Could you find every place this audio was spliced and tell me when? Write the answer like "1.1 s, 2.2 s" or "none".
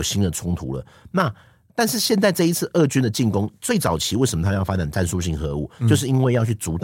none